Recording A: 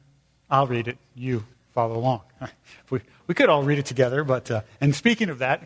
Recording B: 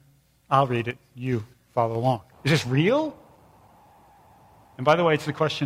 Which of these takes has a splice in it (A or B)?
B